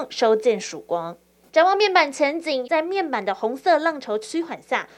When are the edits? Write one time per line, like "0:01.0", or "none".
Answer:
0:01.5
0:02.6